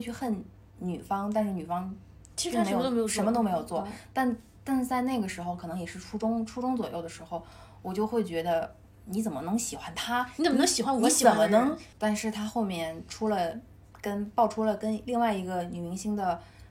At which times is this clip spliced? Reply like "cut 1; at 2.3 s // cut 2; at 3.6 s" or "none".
cut 1; at 11.9 s